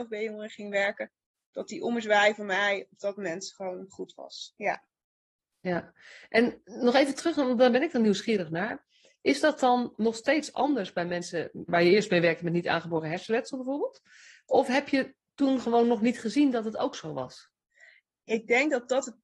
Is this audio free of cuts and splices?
no; 3 cuts; at 5.5 s, 9.9 s, 11.7 s

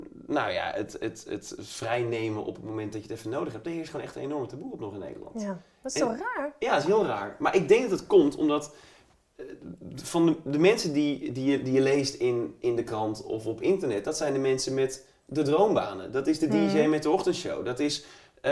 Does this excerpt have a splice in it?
no; 0 cuts

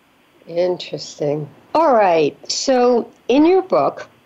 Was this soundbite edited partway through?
yes; 1 cut; at 1.7 s

